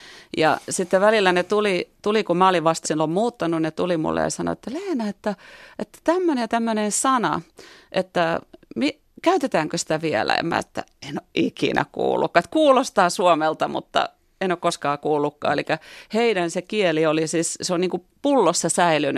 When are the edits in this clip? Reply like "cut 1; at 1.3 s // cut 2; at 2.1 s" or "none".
cut 1; at 2.8 s